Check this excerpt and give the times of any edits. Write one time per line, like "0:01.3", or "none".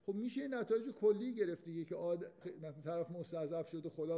0:02.4

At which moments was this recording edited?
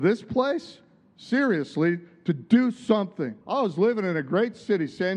0:03.4

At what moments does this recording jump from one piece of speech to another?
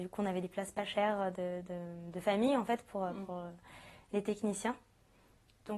none

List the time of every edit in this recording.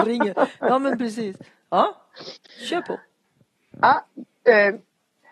none

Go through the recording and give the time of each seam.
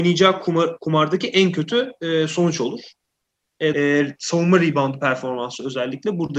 0:03.7

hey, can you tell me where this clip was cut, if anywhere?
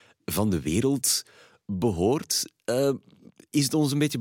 none

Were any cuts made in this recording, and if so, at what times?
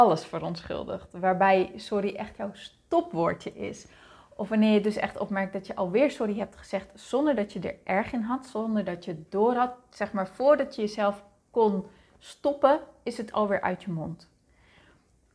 none

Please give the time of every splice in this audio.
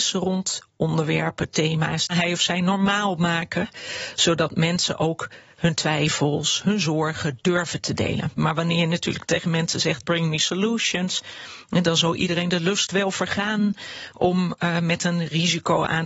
0:02.1
0:10.0

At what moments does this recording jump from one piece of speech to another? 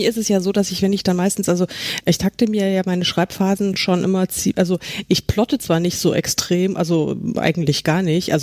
none

